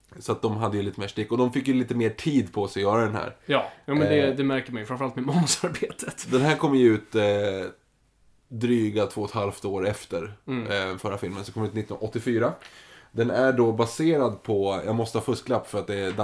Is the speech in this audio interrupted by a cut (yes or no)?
no